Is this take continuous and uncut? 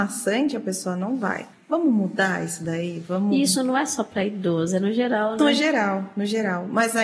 no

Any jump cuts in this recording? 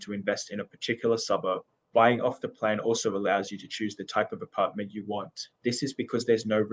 no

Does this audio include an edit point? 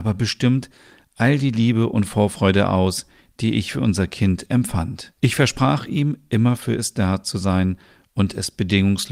yes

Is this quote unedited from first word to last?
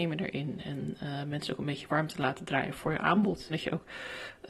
no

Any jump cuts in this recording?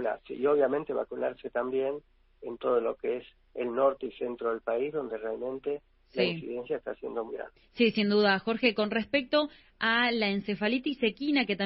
yes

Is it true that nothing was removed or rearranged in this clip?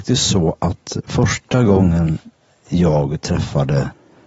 yes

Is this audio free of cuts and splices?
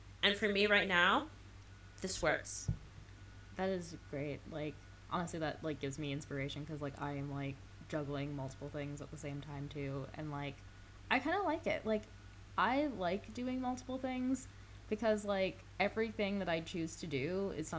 yes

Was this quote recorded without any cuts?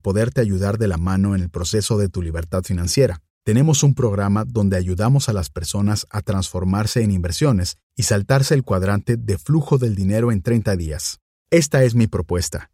no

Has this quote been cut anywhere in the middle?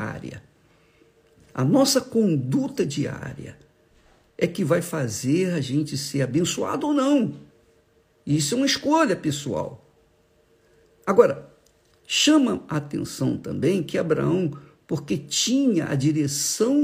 no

